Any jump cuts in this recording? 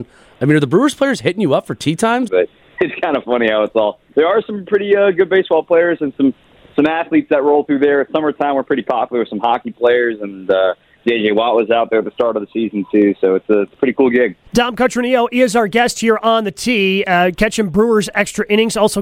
yes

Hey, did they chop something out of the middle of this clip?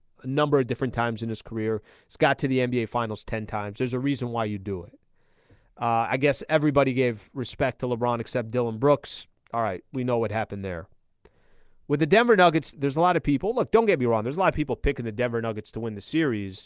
yes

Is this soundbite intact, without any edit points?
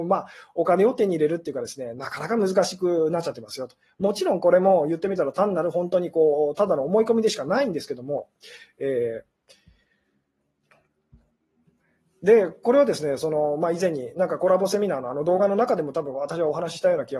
yes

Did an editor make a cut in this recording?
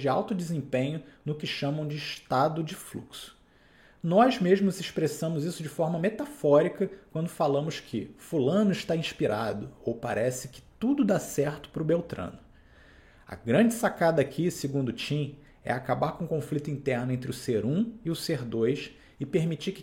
no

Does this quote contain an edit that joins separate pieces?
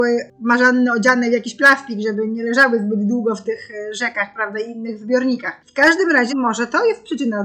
yes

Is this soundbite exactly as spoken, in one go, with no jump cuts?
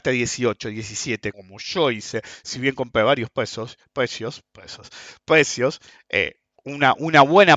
no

